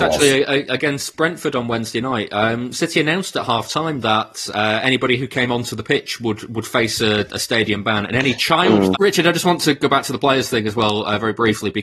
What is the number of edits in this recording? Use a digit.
1